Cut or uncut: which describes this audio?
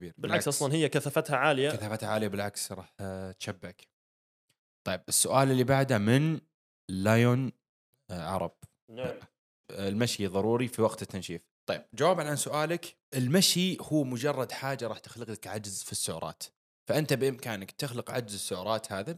cut